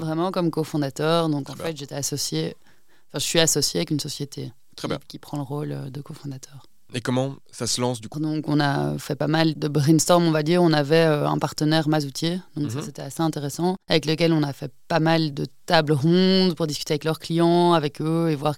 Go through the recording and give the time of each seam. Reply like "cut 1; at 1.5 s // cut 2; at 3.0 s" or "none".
cut 1; at 8.1 s // cut 2; at 13.8 s